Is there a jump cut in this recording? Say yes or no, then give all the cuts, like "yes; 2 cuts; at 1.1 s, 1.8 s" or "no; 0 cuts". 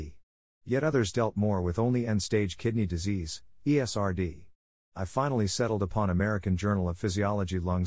no; 0 cuts